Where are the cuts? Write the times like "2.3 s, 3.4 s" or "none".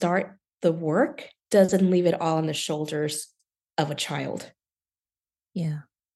1.4 s